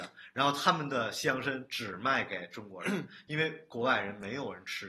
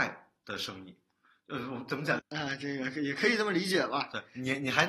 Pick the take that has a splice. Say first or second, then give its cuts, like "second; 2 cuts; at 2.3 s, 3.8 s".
second; 1 cut; at 2.2 s